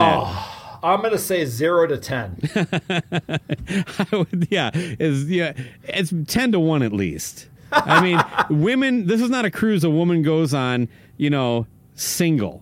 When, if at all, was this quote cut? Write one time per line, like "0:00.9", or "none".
none